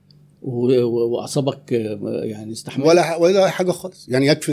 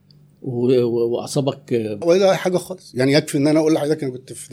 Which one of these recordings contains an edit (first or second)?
second